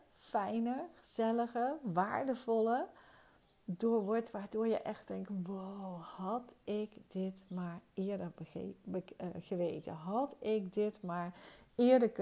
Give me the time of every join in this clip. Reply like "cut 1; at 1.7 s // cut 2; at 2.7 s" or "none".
none